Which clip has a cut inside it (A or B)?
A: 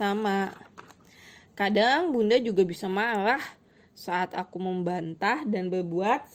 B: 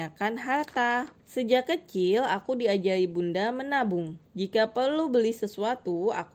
B